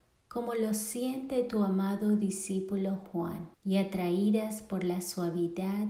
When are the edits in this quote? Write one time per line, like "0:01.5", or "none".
0:03.5